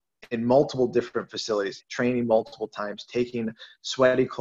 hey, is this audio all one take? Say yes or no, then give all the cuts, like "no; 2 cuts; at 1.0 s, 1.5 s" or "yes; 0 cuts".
no; 1 cut; at 1.8 s